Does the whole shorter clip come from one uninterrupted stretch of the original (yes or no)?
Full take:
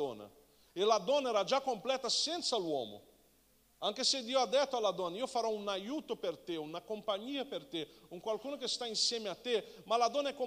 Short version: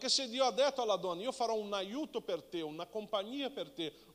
yes